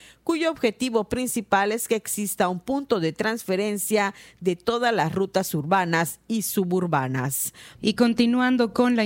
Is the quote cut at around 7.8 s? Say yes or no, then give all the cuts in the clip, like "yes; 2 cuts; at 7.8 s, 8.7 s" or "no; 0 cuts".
yes; 1 cut; at 7.8 s